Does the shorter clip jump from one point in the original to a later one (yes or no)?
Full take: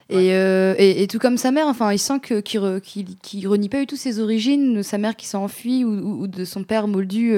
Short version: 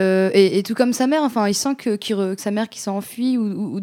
yes